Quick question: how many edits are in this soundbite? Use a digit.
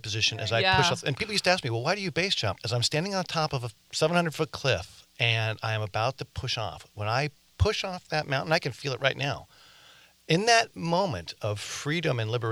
1